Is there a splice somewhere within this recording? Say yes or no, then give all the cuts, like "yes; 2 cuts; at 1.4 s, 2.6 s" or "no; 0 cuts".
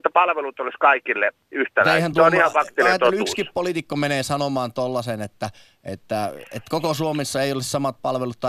no; 0 cuts